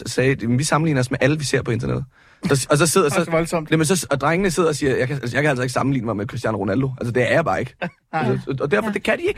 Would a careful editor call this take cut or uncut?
cut